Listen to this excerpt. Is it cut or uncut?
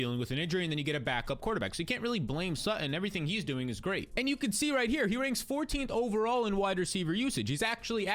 uncut